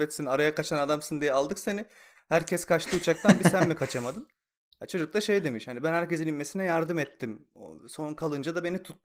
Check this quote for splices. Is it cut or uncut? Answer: uncut